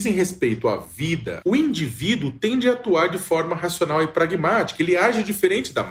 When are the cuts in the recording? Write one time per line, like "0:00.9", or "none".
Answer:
0:01.4

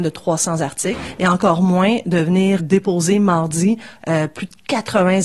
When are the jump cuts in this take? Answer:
0:02.6

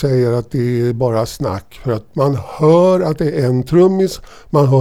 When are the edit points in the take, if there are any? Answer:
none

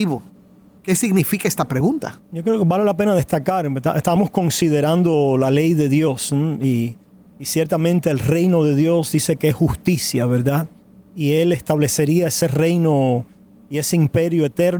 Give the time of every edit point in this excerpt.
none

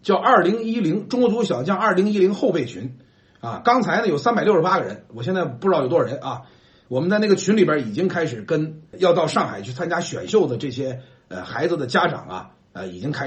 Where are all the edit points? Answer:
0:08.9

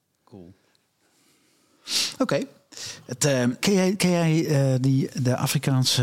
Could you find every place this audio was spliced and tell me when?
0:03.6

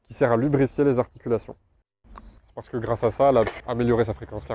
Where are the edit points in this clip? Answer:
0:02.4
0:03.6

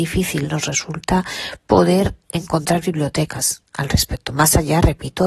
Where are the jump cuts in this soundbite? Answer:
none

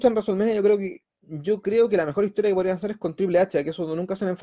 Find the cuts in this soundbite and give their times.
none

